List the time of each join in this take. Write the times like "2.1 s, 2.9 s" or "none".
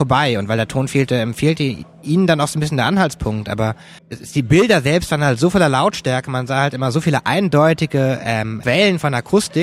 4.0 s, 8.6 s